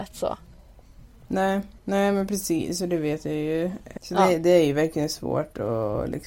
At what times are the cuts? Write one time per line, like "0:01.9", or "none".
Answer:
0:01.8
0:04.0